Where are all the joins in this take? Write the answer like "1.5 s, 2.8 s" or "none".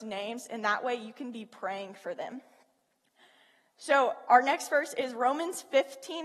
none